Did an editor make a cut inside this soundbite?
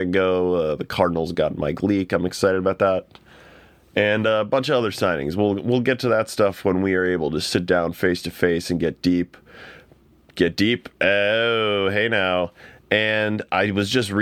no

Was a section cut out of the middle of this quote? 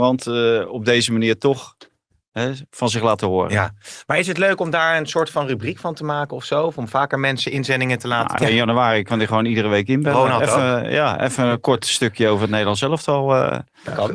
yes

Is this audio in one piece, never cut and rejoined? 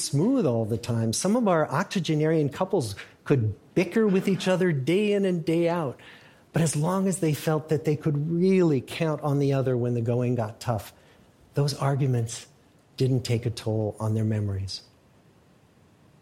yes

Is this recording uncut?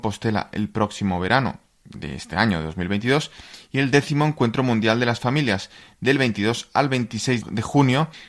yes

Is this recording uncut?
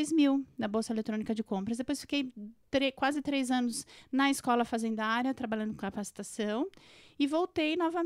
yes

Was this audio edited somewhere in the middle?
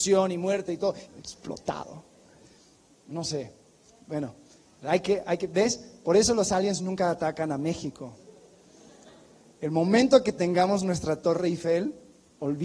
yes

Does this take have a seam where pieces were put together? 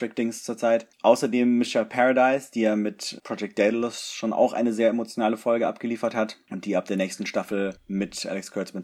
no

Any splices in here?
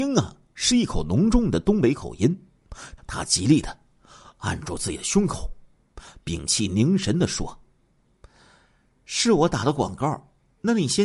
yes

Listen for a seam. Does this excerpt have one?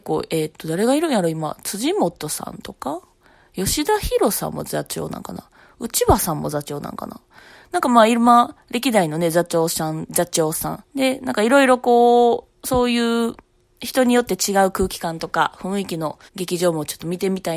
yes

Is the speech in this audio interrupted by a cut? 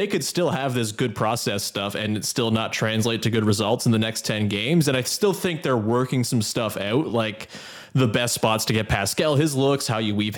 no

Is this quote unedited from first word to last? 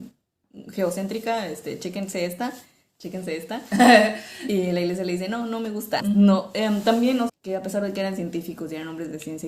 no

